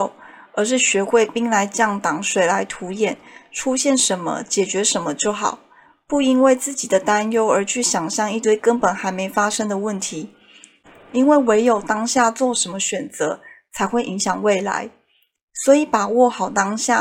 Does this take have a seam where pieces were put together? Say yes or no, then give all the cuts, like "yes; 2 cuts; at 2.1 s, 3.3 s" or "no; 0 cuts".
no; 0 cuts